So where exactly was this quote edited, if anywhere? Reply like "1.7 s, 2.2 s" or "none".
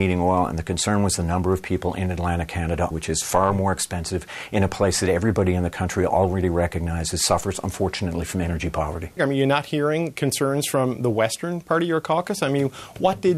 2.9 s, 9.2 s